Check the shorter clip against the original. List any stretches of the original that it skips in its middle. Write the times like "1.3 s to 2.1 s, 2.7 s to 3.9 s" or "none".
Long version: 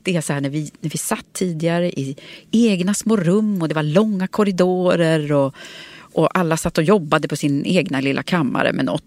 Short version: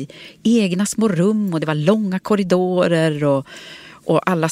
none